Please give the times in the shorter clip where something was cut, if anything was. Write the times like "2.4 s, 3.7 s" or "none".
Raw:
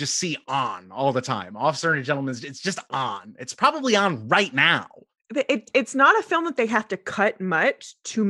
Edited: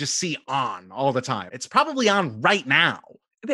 1.5 s